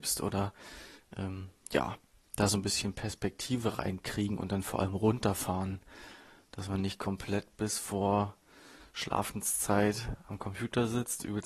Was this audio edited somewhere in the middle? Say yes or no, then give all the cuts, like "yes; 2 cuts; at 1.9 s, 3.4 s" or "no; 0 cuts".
no; 0 cuts